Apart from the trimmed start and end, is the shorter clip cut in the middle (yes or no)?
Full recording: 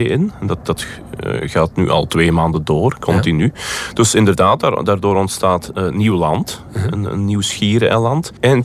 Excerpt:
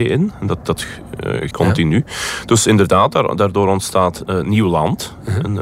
yes